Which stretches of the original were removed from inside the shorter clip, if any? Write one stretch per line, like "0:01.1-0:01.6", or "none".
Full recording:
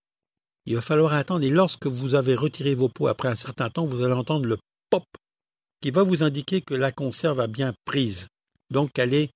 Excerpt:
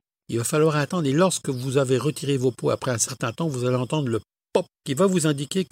0:05.1-0:05.7